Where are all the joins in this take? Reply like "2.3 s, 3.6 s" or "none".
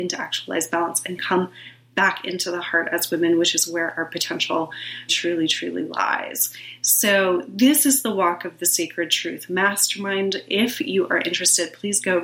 5.1 s